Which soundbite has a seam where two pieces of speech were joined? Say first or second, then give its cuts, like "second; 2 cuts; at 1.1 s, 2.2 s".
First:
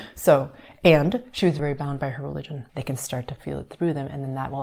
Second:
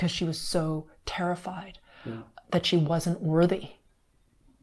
first; 2 cuts; at 1.6 s, 2.7 s